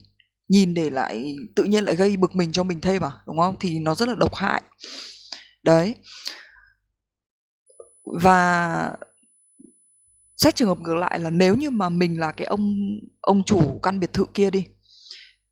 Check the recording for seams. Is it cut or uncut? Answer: uncut